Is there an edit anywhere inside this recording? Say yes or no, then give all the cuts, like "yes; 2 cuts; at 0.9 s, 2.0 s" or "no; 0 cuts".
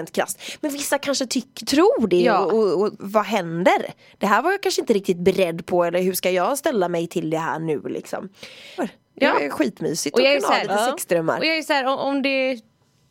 yes; 2 cuts; at 3.0 s, 8.8 s